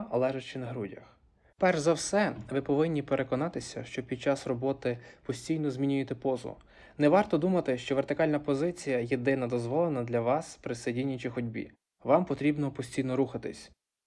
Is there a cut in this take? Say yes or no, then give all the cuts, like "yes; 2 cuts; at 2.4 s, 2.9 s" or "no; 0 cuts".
yes; 1 cut; at 1.5 s